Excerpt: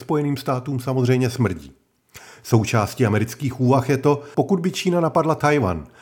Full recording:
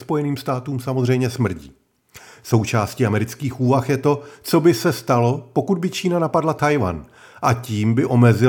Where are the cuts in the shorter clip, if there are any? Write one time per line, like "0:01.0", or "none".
0:04.3

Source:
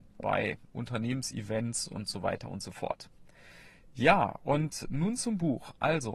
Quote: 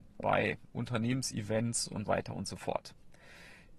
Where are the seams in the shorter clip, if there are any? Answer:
0:02.1

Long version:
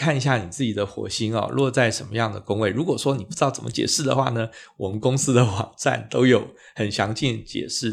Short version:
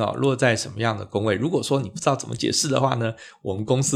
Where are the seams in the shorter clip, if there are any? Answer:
none

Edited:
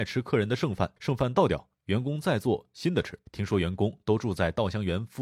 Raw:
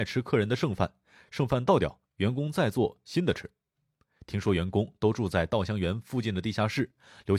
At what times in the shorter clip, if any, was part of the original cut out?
0:01.0
0:03.3

